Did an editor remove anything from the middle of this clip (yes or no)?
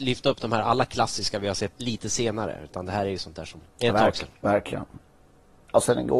yes